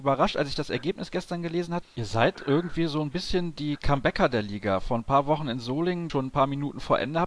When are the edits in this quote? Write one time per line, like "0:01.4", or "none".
0:01.8
0:06.1